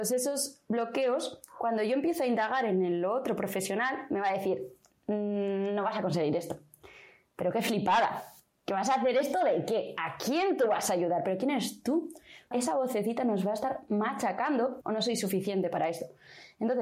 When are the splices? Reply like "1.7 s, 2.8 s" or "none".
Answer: 12.5 s, 14.8 s